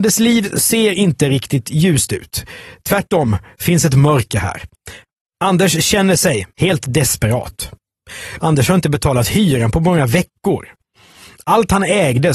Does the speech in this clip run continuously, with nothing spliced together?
no; 2 cuts; at 6.5 s, 8.4 s

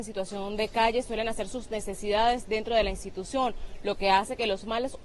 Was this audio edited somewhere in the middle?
no; 0 cuts

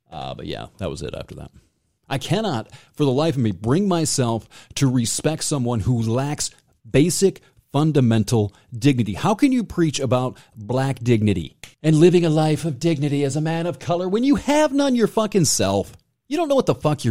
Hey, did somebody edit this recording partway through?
yes; 1 cut; at 11.7 s

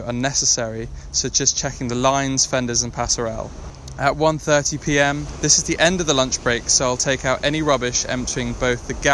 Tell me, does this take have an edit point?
no; 0 cuts

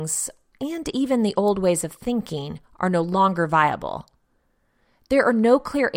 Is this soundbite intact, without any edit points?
yes; 0 cuts

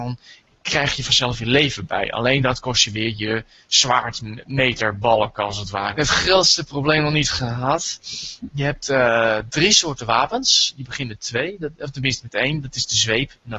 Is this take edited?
yes; 1 cut; at 5.9 s

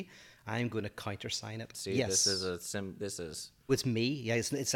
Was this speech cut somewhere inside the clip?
yes; 2 cuts; at 1.7 s, 3.7 s

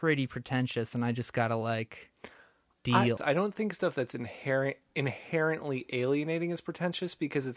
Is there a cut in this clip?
yes; 1 cut; at 3.2 s

